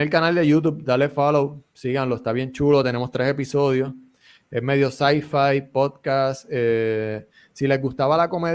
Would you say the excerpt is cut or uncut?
uncut